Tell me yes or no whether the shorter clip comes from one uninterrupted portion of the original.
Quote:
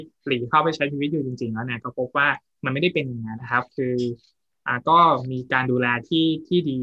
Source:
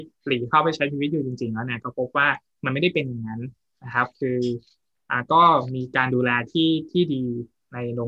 no